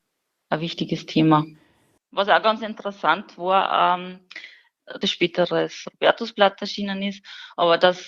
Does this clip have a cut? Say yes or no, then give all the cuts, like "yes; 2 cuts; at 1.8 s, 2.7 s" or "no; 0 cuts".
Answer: yes; 2 cuts; at 2.0 s, 5.0 s